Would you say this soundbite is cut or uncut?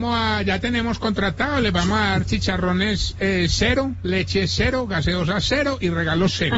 uncut